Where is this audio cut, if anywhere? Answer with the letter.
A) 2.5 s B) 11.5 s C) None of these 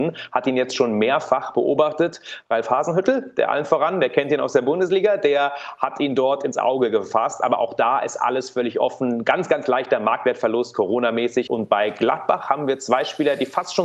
B